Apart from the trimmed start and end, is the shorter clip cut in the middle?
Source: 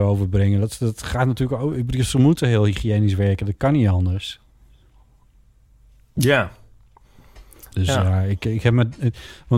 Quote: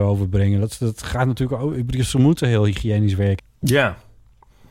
yes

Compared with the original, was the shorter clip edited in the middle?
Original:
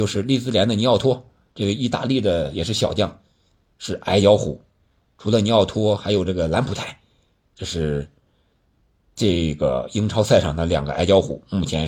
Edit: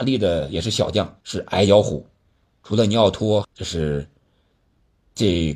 yes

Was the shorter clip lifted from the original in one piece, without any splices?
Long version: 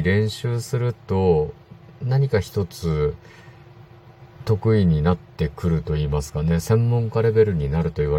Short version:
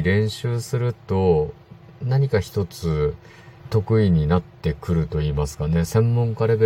no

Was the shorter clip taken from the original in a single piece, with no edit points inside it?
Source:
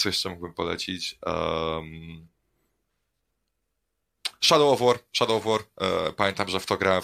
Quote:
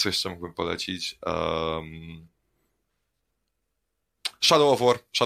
yes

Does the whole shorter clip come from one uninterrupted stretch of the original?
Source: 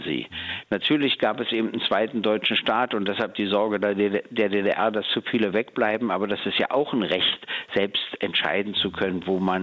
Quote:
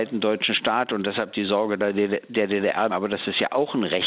no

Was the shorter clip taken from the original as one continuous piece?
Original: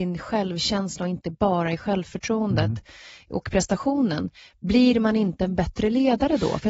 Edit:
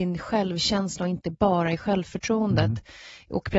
yes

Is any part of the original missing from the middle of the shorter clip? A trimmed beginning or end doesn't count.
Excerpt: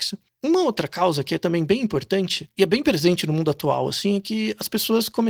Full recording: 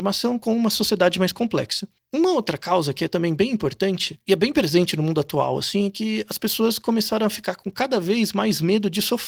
no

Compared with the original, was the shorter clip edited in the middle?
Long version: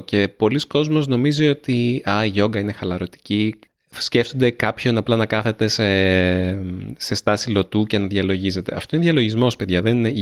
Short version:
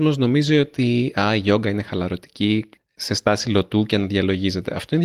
yes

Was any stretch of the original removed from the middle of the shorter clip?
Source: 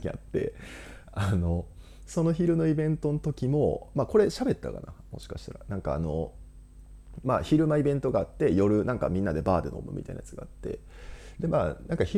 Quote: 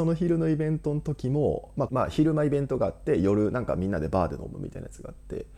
yes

